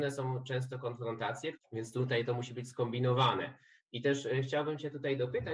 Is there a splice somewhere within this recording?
yes; 1 cut; at 1.5 s

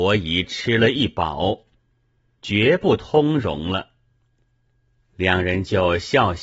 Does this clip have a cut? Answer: yes; 1 cut; at 2.4 s

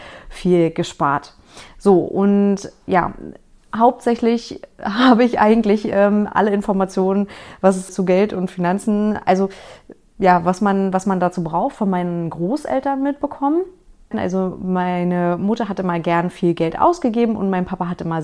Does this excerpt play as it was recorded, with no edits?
no; 2 cuts; at 7.9 s, 14.1 s

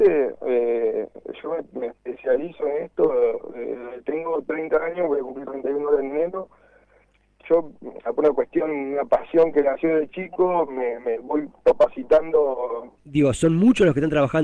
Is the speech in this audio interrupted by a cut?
yes; 1 cut; at 13.0 s

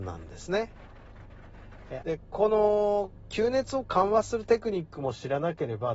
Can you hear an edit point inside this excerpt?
yes; 1 cut; at 2.0 s

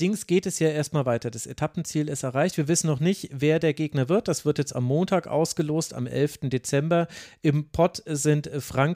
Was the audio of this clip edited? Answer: no; 0 cuts

